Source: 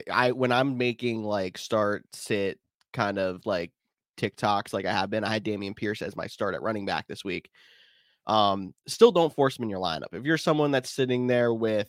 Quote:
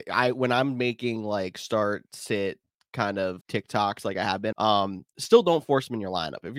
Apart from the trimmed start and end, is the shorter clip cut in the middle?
yes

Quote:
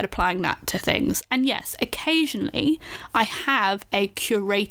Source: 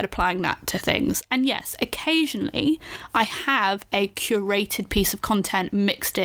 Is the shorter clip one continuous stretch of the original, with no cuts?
yes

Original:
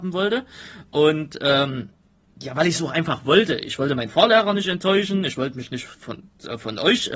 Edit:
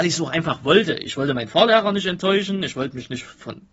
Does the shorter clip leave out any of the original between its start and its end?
no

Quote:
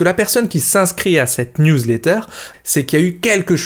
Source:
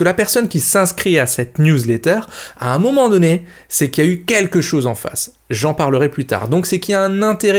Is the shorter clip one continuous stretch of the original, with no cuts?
no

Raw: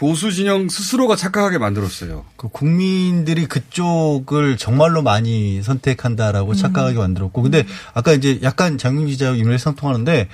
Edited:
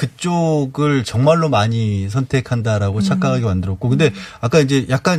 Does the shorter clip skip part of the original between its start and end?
no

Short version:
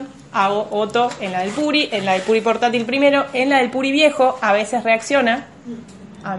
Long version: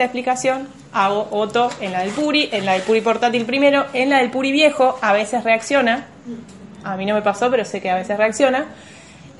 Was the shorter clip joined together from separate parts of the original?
no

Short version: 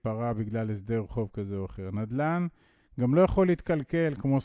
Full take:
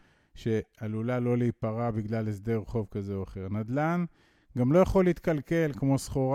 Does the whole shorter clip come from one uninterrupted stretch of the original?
yes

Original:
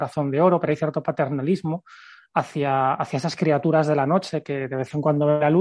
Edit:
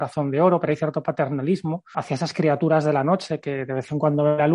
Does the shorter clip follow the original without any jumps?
no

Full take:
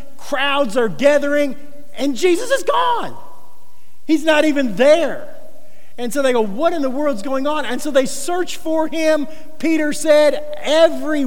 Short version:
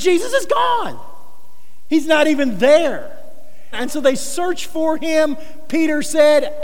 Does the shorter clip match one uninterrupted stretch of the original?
no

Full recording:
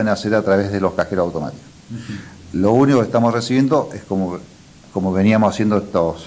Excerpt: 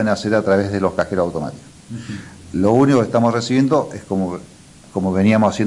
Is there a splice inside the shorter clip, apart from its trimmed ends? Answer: no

